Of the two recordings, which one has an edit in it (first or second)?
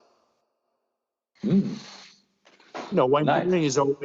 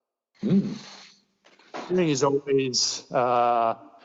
second